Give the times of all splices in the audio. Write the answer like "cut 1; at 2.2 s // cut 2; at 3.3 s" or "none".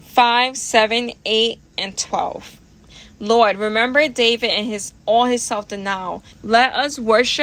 cut 1; at 6.3 s